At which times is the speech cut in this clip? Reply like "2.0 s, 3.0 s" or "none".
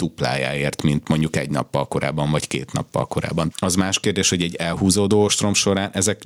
3.5 s